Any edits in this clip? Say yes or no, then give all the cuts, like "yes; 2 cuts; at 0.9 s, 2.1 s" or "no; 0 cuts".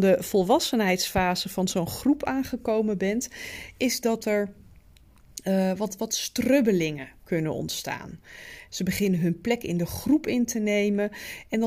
yes; 1 cut; at 8.7 s